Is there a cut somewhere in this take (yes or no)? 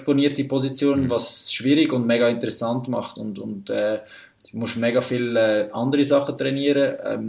no